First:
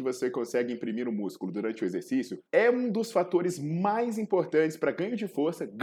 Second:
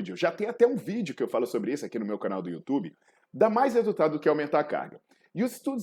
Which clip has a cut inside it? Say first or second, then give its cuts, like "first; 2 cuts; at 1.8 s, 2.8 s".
first; 1 cut; at 2.4 s